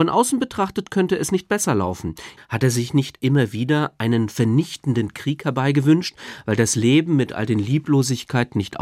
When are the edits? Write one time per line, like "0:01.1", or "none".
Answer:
0:02.4